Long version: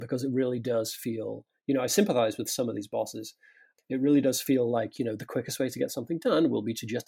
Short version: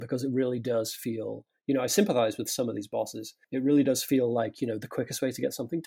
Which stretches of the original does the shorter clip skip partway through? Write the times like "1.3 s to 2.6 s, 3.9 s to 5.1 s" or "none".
3.4 s to 3.8 s

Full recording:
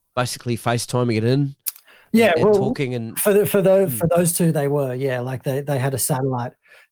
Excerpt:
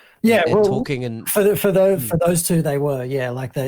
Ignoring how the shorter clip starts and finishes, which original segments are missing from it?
none

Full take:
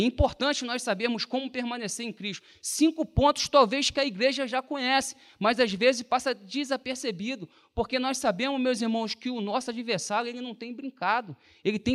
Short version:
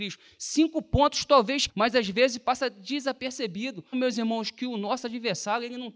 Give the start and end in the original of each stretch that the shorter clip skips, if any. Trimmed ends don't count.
3.9 s to 5.3 s, 7.6 s to 8.6 s

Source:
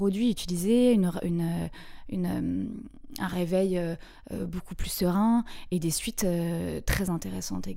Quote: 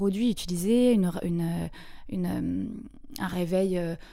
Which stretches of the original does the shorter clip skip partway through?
none

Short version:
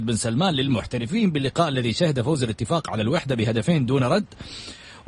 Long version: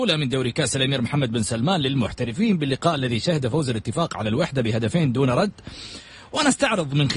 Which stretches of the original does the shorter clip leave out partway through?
none

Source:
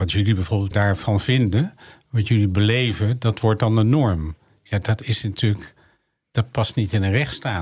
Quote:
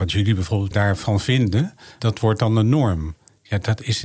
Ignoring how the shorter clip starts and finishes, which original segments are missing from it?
2.0 s to 3.2 s

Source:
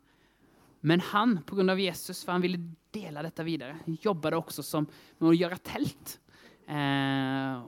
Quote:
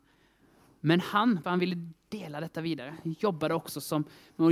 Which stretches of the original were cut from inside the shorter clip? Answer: 1.4 s to 2.3 s

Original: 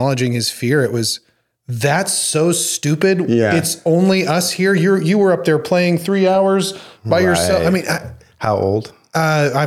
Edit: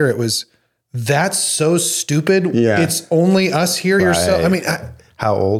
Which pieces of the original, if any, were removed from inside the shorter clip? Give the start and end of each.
4.7 s to 7.2 s

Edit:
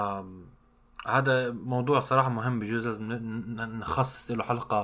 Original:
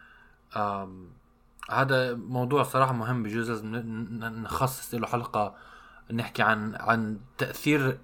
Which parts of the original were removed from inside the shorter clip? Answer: none

